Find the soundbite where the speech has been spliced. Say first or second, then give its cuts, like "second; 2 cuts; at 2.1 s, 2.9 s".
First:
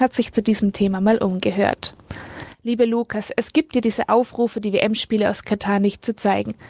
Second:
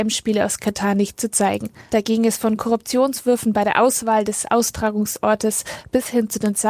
second; 1 cut; at 1.9 s